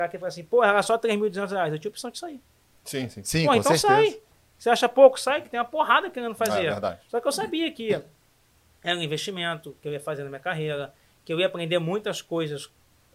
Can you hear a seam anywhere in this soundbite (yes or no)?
no